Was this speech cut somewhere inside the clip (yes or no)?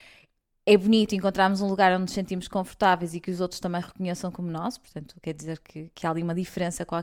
no